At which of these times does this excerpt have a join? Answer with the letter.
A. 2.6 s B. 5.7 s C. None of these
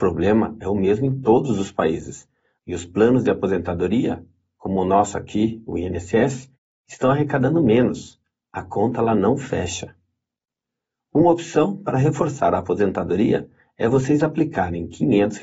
A